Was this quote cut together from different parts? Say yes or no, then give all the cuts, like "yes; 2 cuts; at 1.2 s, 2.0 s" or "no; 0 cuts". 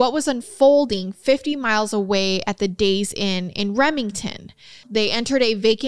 yes; 1 cut; at 4.8 s